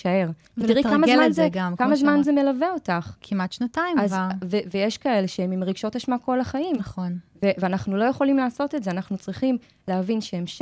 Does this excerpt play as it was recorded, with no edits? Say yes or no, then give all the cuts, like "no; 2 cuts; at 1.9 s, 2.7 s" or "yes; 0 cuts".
yes; 0 cuts